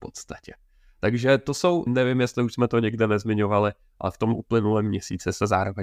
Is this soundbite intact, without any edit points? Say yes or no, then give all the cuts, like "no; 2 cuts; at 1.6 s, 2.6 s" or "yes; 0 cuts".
no; 1 cut; at 1.9 s